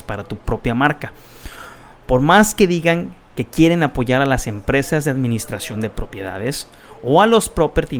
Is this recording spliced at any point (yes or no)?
no